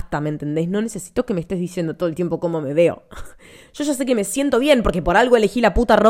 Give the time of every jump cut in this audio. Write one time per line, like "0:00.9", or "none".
none